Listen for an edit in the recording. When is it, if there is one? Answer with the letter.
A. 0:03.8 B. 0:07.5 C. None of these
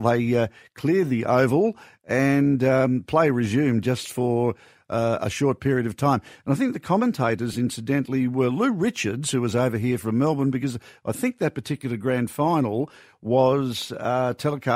C